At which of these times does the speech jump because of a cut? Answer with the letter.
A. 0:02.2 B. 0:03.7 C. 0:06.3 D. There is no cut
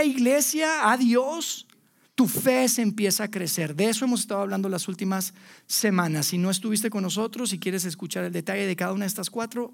A